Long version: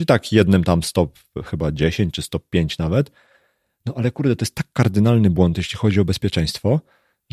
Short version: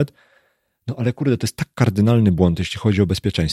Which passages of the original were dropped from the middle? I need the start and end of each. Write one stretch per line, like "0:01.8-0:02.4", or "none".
none